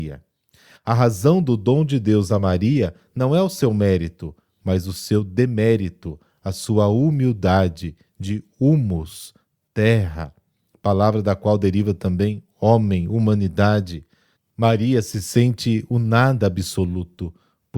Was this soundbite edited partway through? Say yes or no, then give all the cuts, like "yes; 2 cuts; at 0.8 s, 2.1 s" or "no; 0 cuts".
no; 0 cuts